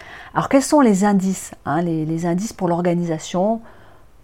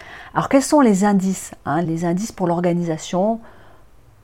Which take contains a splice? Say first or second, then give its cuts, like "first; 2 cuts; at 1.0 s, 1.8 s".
second; 1 cut; at 1.8 s